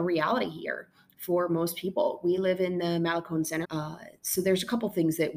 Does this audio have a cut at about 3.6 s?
yes; 1 cut; at 3.6 s

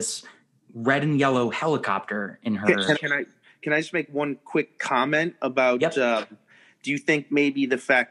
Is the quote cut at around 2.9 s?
yes; 1 cut; at 2.9 s

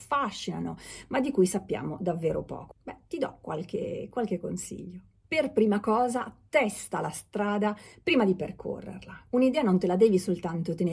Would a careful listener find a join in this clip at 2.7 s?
yes; 1 cut; at 2.7 s

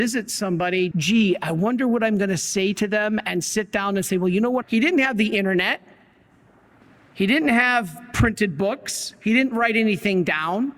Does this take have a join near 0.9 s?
yes; 2 cuts; at 0.9 s, 4.6 s

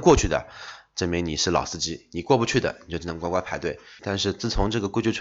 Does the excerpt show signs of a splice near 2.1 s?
no; 1 cut; at 4.0 s

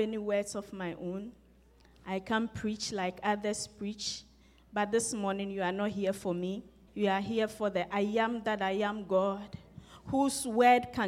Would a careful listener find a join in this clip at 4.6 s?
no; 1 cut; at 6.9 s

